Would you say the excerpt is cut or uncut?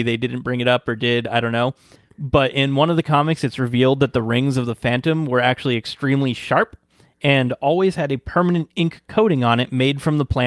uncut